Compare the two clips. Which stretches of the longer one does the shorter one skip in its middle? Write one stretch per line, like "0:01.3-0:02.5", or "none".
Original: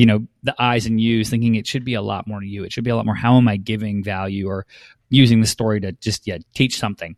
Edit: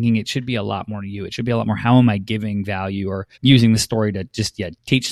0:04.7-0:05.0

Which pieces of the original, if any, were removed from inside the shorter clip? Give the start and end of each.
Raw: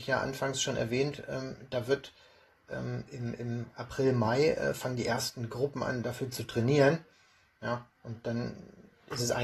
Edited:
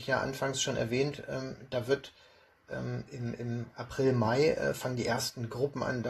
none

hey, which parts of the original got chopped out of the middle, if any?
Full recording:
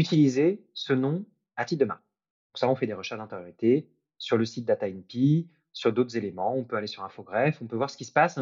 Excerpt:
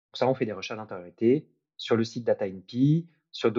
none

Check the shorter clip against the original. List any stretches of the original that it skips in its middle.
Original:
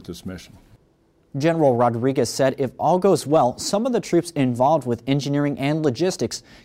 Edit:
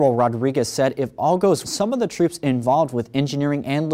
0:03.2-0:03.6

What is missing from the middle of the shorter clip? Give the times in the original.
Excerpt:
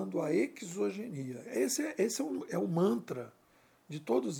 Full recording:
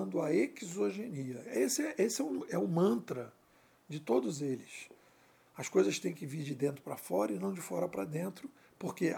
none

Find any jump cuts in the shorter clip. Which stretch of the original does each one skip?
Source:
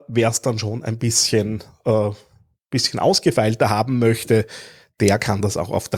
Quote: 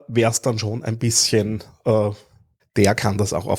0:02.6-0:04.8

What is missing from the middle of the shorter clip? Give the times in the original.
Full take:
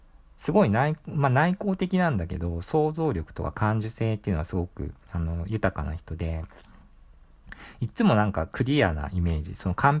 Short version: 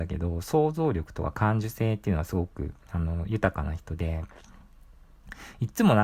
none

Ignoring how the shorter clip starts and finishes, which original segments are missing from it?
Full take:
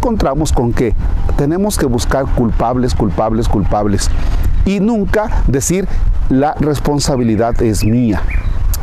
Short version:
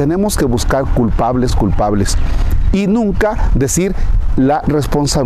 0:02.9-0:03.4

